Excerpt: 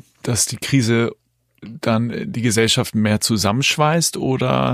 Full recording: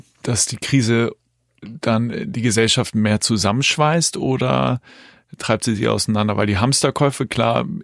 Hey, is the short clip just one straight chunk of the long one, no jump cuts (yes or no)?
yes